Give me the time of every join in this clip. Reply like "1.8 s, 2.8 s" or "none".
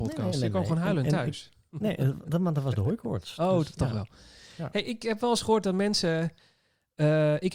none